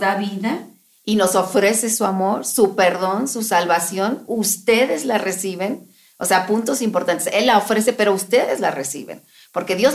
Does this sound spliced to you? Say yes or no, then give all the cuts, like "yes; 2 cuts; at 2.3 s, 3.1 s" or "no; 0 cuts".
no; 0 cuts